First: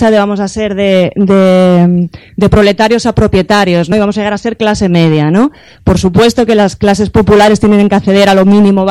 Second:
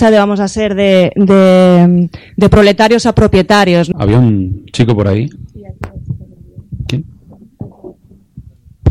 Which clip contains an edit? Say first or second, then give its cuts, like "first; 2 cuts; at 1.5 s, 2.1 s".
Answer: second; 1 cut; at 3.9 s